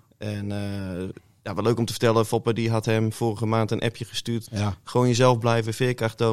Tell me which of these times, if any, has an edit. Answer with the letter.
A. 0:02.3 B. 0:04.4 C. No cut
B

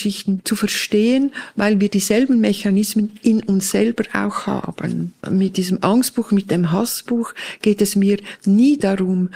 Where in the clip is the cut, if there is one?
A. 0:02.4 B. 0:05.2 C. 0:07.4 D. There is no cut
B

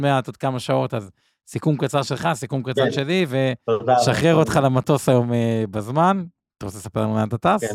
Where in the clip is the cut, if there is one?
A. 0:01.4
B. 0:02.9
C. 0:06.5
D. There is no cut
D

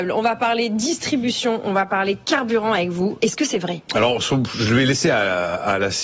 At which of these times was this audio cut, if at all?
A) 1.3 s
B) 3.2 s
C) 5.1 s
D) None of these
B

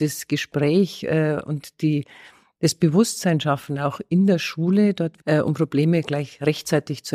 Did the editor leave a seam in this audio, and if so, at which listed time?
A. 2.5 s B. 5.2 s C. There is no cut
B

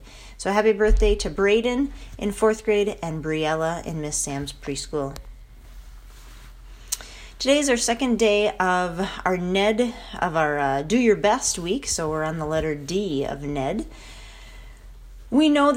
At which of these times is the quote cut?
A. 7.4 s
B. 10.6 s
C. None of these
C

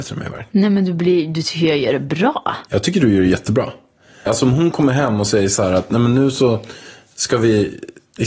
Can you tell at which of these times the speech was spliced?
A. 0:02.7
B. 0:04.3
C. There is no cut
B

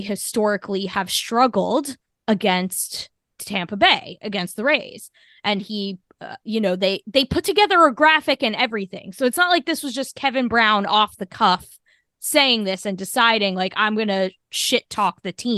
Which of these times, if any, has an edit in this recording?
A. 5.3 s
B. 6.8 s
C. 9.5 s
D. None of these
D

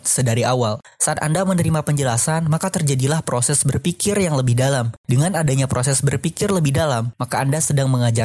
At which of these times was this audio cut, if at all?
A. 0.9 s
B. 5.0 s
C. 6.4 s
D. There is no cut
D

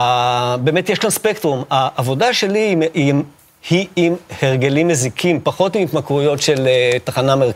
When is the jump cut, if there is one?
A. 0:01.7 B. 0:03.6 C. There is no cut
C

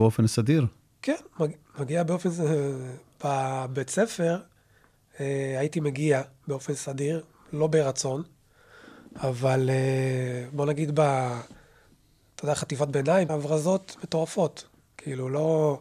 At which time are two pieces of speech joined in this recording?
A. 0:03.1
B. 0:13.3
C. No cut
B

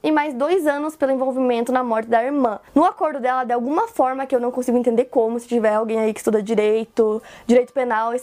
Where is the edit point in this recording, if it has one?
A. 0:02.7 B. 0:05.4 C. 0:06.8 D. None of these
A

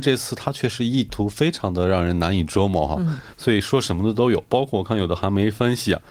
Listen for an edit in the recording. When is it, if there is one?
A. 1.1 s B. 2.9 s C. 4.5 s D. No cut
D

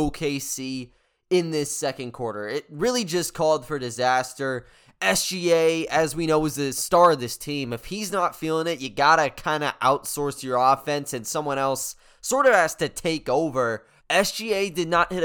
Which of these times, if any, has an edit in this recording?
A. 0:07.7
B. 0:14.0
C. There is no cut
B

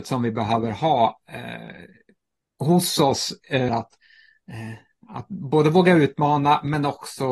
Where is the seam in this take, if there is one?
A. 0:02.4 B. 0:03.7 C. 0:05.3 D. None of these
B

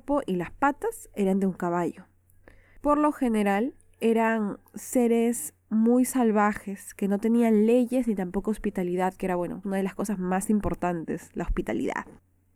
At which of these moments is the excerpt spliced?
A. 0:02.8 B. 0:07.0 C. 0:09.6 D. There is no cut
C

